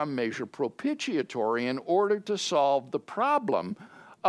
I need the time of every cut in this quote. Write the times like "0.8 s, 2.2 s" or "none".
none